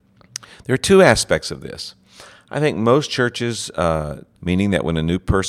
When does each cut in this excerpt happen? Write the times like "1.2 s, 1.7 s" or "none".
4.3 s